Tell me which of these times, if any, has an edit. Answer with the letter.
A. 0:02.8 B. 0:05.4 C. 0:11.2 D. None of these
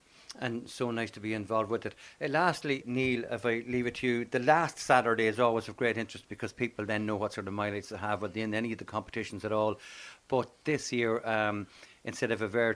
A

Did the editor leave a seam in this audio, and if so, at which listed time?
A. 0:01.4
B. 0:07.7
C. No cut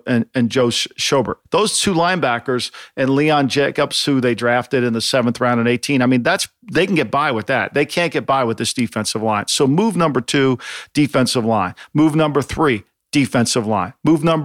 A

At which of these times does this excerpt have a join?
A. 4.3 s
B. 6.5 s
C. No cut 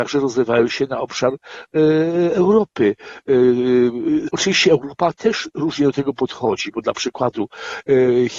A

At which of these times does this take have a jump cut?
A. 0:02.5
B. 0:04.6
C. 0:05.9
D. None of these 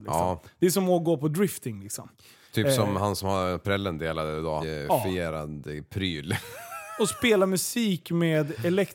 B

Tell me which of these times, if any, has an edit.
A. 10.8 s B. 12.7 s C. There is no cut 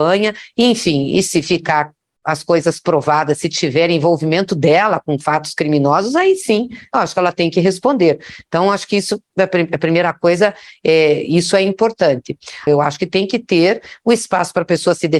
B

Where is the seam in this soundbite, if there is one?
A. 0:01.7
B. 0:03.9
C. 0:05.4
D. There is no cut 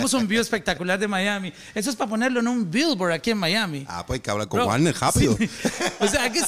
D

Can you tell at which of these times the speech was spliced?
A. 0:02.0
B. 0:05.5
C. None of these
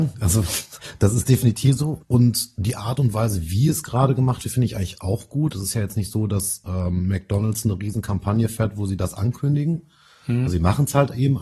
A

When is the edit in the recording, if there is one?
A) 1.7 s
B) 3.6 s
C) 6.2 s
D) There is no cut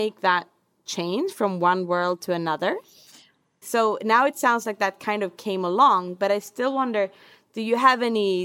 B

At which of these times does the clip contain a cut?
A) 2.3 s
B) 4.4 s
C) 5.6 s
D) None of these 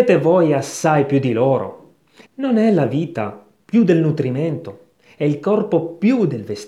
A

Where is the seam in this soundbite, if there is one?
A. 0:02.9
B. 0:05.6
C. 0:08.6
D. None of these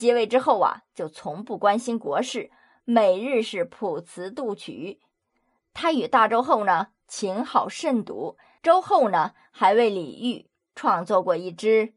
C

